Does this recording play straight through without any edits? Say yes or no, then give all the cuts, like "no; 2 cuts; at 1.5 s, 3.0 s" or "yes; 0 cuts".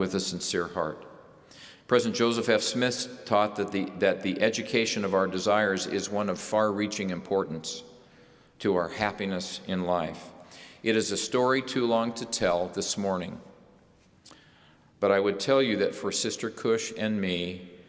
yes; 0 cuts